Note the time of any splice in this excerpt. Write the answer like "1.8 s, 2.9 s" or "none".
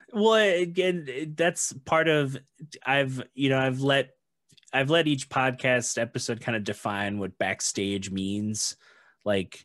none